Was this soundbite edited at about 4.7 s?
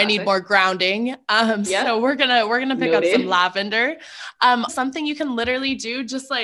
yes; 1 cut; at 4.7 s

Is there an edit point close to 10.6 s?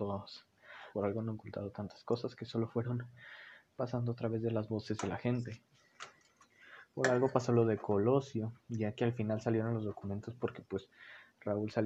no; 2 cuts; at 0.9 s, 8.6 s

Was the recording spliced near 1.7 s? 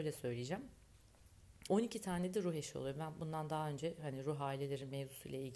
yes; 1 cut; at 1.7 s

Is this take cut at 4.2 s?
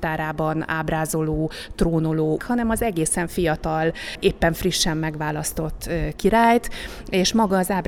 no; 1 cut; at 2.4 s

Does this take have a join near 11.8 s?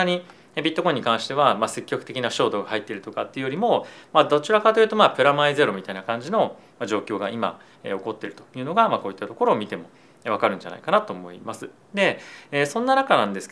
yes; 1 cut; at 11.8 s

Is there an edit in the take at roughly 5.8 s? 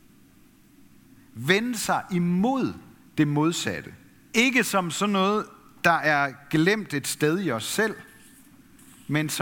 no; 1 cut; at 4.3 s

